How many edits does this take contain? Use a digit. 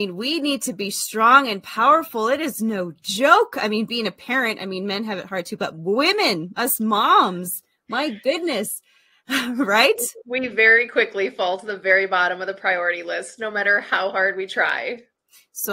0